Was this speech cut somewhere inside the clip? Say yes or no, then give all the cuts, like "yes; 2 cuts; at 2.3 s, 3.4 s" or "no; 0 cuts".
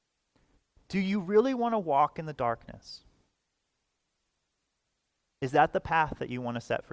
no; 0 cuts